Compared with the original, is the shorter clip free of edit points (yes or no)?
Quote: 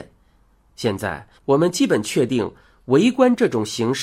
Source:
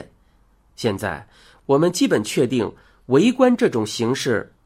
no